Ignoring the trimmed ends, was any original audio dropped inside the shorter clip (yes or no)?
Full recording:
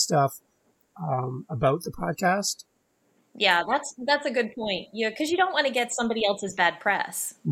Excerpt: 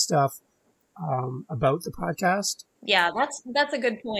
yes